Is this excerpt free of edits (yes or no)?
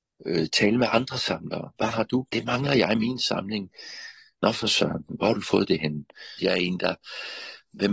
no